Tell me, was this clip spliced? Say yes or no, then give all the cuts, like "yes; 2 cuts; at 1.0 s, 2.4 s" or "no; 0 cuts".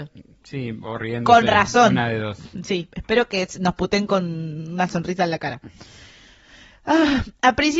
no; 0 cuts